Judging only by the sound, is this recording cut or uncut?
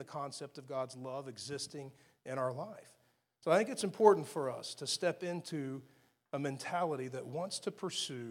uncut